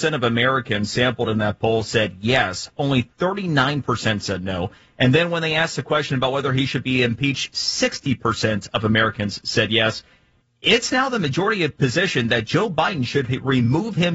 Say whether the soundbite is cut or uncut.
uncut